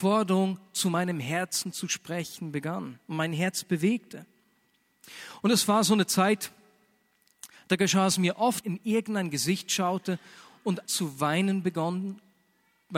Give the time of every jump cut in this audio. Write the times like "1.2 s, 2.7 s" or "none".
8.6 s, 10.9 s